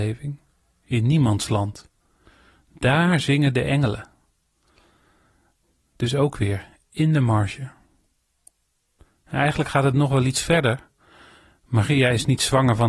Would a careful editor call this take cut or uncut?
uncut